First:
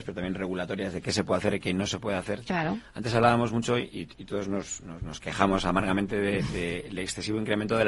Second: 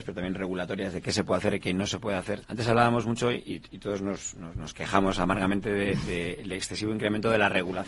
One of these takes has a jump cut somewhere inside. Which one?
second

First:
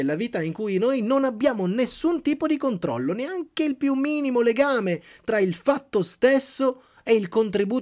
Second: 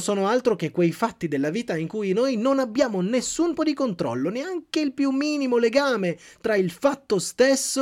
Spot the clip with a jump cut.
second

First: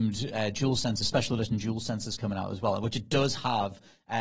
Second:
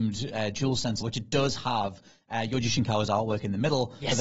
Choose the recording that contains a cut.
second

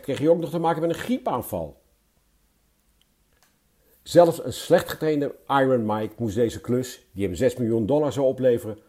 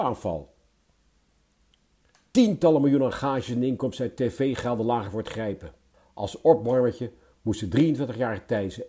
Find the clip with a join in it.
second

